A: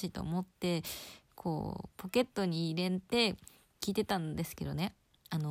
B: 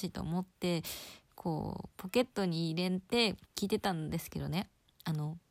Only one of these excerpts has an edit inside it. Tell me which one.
B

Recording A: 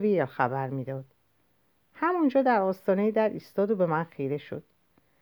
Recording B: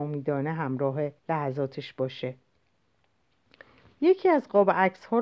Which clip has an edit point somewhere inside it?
B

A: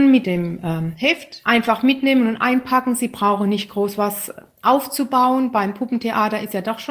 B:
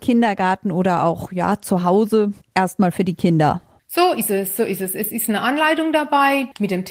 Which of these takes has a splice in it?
A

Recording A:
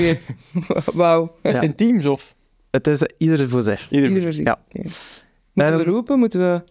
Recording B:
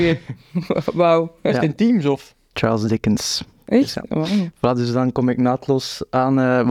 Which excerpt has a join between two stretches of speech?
B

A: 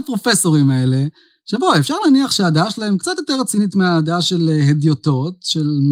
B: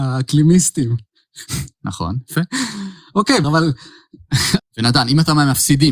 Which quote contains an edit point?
B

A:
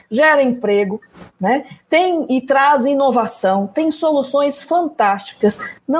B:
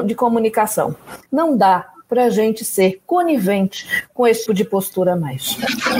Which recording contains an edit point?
B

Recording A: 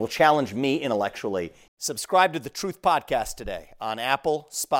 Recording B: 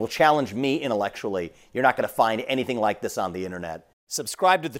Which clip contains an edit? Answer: A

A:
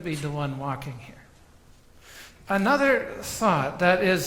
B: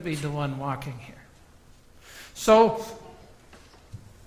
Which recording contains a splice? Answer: A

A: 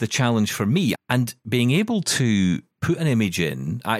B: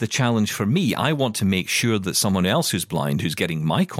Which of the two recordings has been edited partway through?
A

